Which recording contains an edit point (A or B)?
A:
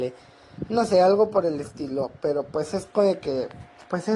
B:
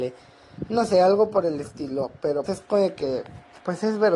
B